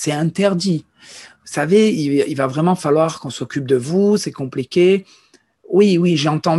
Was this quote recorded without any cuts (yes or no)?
yes